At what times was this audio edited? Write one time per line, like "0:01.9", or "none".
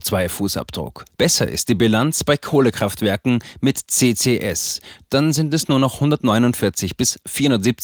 0:01.1